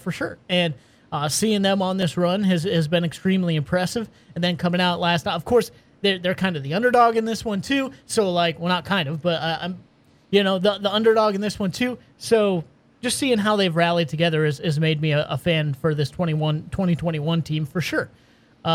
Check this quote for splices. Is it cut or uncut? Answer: uncut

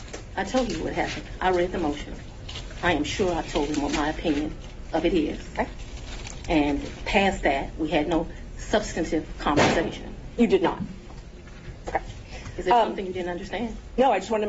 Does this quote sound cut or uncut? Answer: uncut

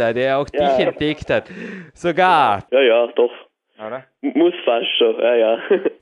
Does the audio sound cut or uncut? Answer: cut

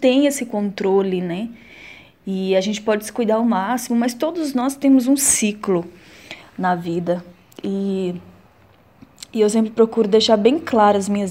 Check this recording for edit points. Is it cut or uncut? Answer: uncut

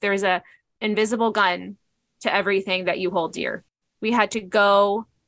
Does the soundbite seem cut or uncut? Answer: cut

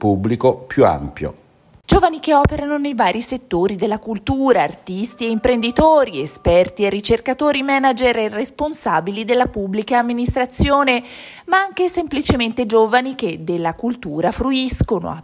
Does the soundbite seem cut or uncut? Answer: cut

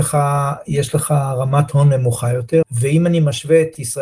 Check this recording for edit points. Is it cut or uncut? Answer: cut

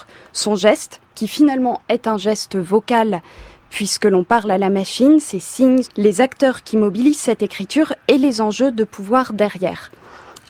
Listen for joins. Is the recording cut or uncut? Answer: cut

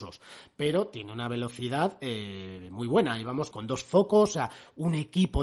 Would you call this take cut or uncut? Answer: cut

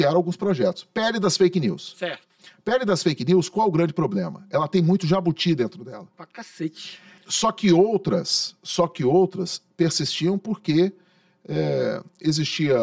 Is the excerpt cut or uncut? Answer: cut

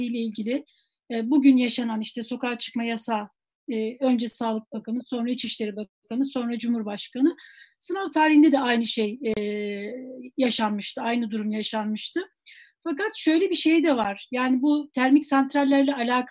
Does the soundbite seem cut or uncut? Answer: uncut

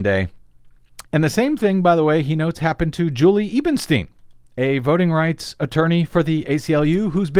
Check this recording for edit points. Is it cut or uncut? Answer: cut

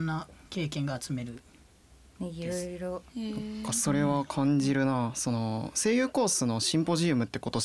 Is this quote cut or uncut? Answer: uncut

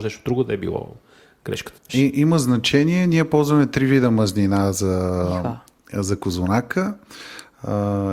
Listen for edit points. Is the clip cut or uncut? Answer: cut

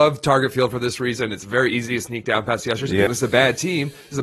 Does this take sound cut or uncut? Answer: cut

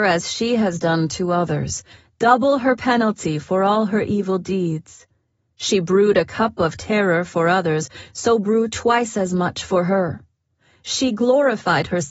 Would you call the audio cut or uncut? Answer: uncut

